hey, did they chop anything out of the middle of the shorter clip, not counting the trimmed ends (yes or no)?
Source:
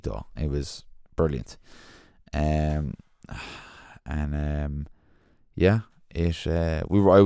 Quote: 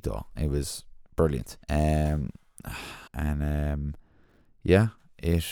yes